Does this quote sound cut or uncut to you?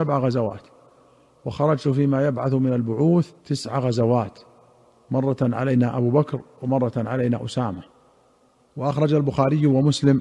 cut